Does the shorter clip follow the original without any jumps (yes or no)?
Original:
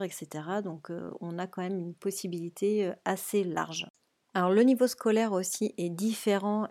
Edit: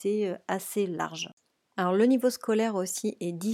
yes